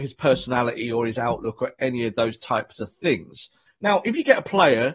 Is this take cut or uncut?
cut